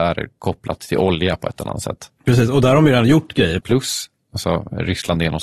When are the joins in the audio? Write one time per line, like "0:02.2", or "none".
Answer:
0:03.6